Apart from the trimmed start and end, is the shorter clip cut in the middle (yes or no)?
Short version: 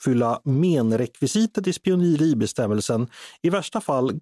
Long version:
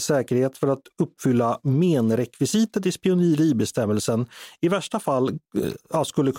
no